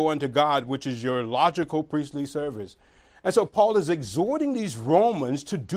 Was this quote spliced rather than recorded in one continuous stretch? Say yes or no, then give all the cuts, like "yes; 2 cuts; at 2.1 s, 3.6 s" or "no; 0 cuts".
no; 0 cuts